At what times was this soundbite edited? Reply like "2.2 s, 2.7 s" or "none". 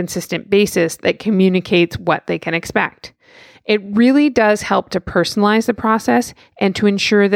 none